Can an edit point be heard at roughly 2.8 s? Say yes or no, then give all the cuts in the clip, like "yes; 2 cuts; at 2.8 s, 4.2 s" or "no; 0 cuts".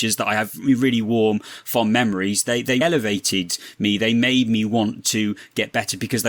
yes; 1 cut; at 2.8 s